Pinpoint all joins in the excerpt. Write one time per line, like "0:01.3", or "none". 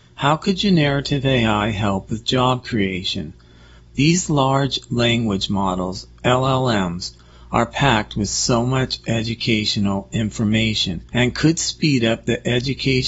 0:03.8
0:11.1